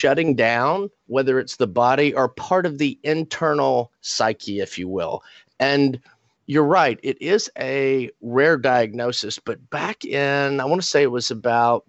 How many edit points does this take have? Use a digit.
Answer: 0